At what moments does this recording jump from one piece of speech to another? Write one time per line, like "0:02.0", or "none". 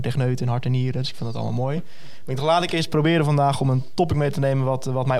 none